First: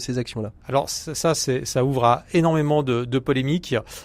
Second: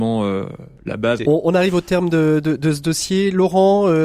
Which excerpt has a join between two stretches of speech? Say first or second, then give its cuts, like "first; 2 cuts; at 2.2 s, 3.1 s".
second; 1 cut; at 1.2 s